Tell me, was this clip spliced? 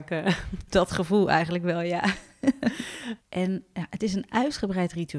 yes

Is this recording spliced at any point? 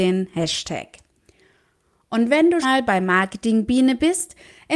yes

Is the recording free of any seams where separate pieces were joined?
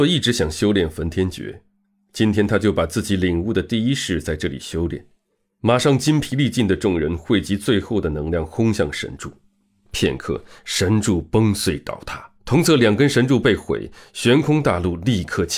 no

